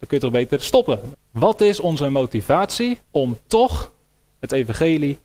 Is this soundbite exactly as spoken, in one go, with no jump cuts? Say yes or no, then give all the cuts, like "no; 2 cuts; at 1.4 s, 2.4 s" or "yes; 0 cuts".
no; 2 cuts; at 1.1 s, 3.0 s